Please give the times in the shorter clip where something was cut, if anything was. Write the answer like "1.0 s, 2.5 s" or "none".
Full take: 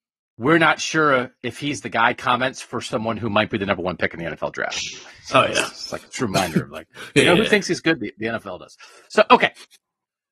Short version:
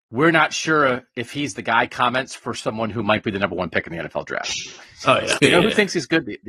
5.4 s